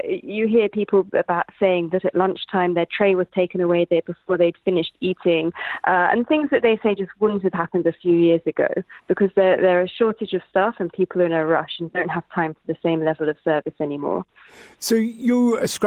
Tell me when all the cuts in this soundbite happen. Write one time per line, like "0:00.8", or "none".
none